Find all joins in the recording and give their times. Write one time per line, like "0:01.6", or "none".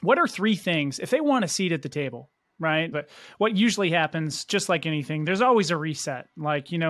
0:02.9